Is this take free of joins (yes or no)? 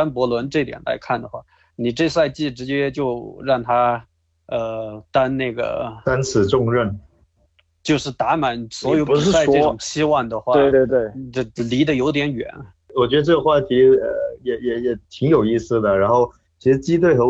no